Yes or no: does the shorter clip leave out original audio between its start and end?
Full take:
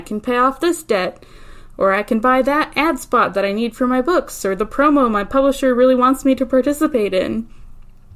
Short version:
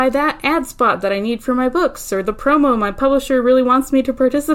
no